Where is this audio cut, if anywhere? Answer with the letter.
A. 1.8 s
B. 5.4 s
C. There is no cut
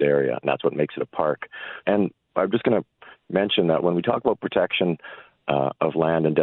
A